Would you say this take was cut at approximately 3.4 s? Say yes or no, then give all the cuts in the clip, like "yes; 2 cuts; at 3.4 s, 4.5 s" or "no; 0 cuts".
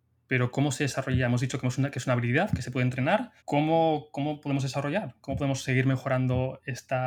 yes; 1 cut; at 3.4 s